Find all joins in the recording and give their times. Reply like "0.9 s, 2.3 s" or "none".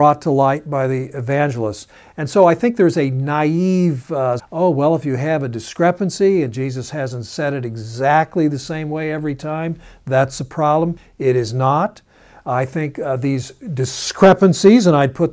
4.4 s